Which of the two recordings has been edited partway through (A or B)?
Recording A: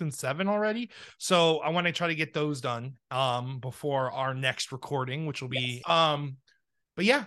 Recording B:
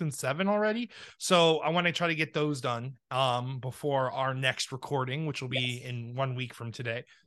A